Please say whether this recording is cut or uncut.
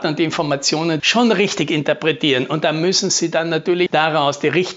cut